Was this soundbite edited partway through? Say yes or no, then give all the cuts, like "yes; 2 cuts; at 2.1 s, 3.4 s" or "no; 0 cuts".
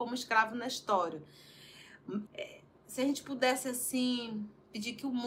yes; 1 cut; at 2.2 s